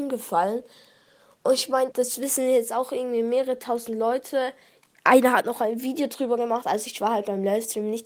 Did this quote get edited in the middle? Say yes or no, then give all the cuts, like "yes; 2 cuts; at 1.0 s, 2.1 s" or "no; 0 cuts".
yes; 1 cut; at 1.9 s